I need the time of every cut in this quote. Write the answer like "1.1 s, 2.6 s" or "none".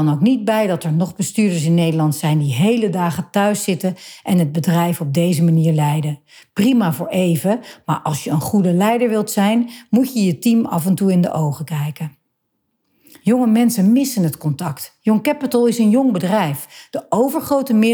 none